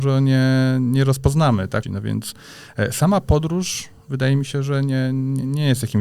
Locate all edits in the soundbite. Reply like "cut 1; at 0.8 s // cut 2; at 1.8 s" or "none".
cut 1; at 1.8 s